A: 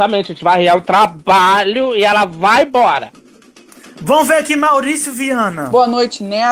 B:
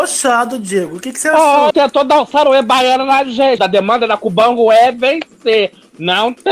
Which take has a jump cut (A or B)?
B